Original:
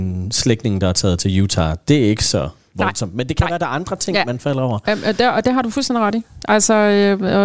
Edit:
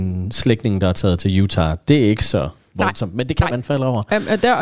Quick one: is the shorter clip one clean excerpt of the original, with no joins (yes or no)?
no